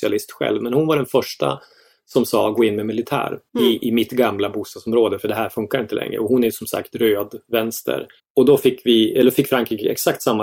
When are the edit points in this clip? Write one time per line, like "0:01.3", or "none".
0:03.5
0:08.2